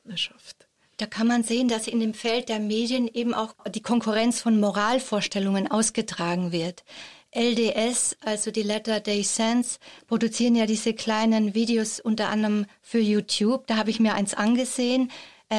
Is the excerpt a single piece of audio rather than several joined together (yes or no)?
yes